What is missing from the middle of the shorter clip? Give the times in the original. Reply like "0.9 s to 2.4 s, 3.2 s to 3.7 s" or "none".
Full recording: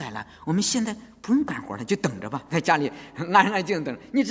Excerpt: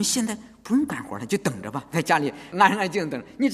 3.1 s to 3.3 s